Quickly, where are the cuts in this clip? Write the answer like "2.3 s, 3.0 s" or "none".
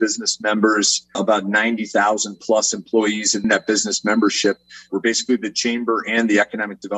4.9 s